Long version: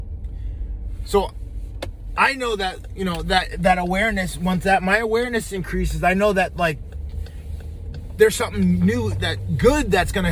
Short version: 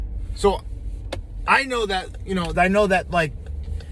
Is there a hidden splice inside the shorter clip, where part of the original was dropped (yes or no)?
yes